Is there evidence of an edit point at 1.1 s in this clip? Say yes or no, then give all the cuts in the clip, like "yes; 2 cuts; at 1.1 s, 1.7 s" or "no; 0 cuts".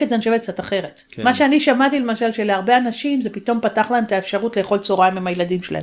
yes; 1 cut; at 1.1 s